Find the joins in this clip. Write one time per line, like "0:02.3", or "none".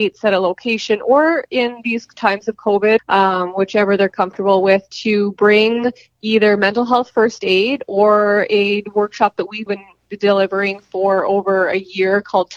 0:03.0
0:09.7